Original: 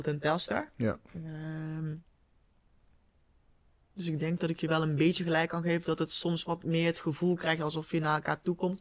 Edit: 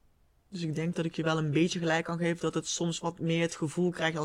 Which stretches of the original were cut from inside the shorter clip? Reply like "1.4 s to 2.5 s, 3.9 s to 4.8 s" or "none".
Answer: none